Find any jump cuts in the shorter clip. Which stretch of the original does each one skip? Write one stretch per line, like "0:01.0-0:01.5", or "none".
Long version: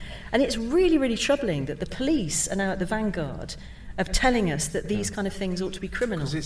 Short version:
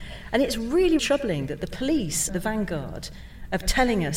0:01.0-0:01.2
0:02.5-0:02.7